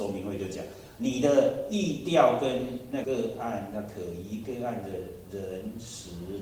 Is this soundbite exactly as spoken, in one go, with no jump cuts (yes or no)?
no